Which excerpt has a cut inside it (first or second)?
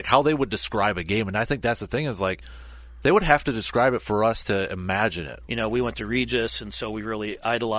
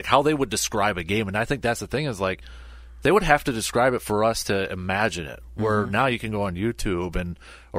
first